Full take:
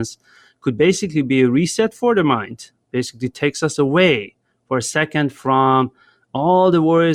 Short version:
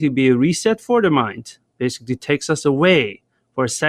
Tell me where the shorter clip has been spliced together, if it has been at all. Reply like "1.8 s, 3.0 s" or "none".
none